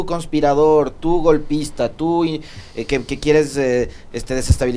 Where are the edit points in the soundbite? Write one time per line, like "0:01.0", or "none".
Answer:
none